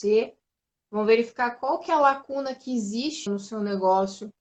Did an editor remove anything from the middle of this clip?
yes; 1 cut; at 3.3 s

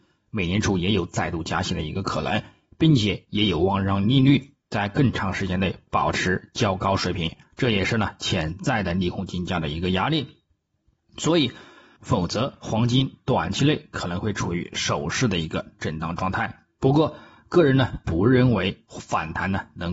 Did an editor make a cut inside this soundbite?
yes; 1 cut; at 12.0 s

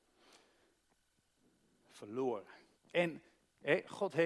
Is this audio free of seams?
no; 1 cut; at 2.8 s

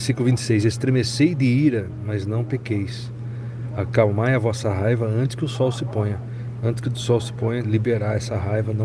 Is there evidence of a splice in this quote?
yes; 1 cut; at 7.6 s

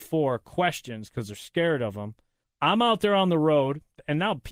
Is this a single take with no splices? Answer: no; 1 cut; at 2.4 s

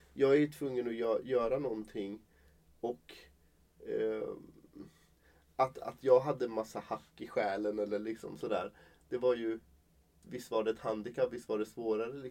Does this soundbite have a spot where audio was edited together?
yes; 1 cut; at 10.2 s

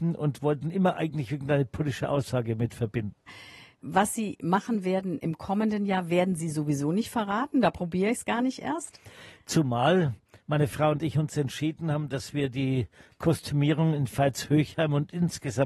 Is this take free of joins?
yes; 0 cuts

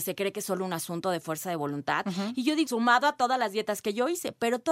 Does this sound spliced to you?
yes; 1 cut; at 2.7 s

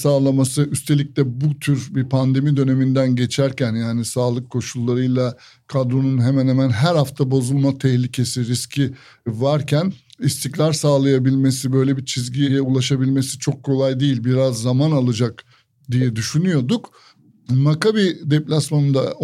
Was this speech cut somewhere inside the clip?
no; 0 cuts

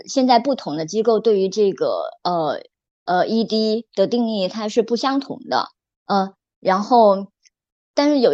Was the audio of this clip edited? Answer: no; 0 cuts

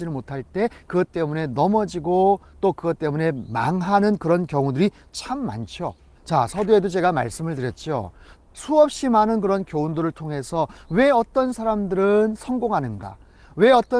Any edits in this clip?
yes; 2 cuts; at 6.2 s, 8.4 s

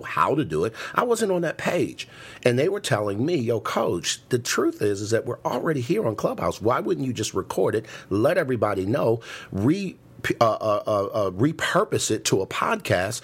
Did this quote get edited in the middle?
no; 0 cuts

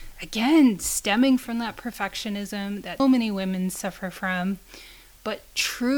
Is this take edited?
yes; 1 cut; at 3.0 s

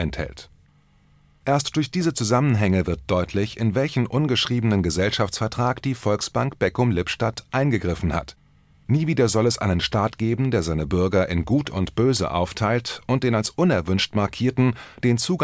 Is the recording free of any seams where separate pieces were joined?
no; 2 cuts; at 1.4 s, 8.7 s

